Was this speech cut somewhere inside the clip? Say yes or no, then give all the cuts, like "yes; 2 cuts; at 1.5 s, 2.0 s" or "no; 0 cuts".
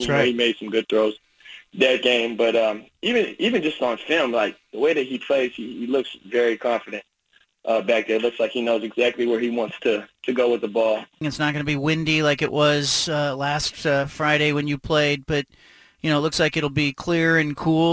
yes; 1 cut; at 11.2 s